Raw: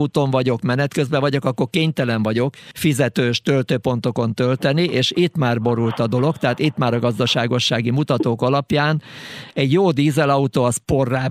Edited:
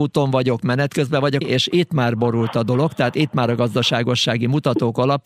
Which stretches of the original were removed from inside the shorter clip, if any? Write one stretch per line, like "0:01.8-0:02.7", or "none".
0:01.4-0:04.9